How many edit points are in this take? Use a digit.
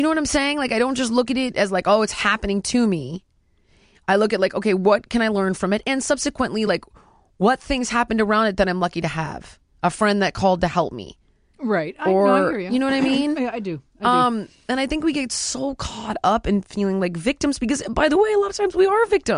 0